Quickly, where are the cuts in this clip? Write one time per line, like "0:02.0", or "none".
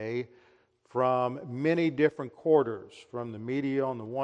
none